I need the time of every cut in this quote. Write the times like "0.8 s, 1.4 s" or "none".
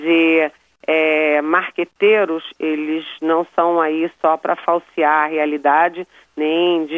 none